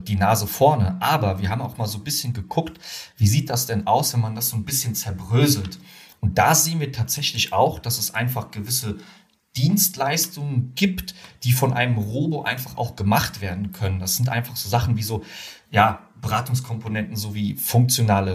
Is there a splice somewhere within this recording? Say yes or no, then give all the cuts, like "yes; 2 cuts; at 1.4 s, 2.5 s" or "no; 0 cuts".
no; 0 cuts